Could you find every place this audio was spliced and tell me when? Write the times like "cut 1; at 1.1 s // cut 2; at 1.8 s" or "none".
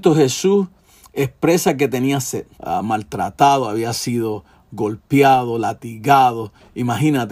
cut 1; at 2.6 s